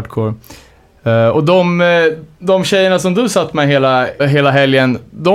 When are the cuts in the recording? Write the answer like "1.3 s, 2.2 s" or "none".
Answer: 4.2 s